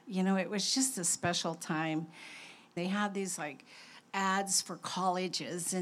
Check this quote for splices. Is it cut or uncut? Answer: cut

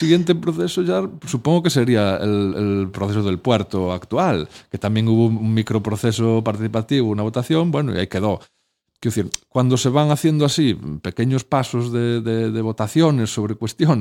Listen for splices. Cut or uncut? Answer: uncut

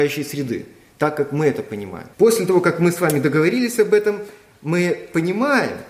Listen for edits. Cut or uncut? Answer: cut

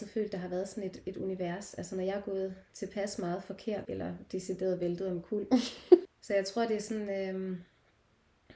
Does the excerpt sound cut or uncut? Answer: cut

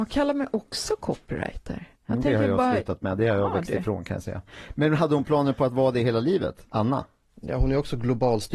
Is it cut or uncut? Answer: uncut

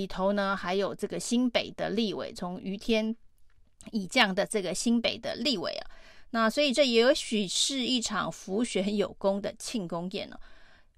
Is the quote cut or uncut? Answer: uncut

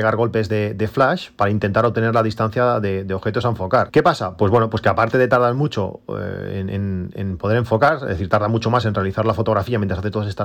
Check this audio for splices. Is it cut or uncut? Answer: cut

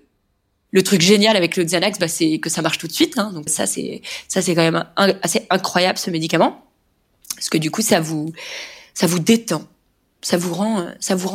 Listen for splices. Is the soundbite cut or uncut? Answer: cut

